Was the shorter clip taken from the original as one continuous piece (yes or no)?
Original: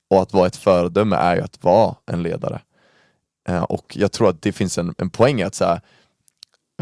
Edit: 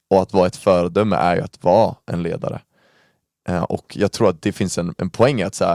yes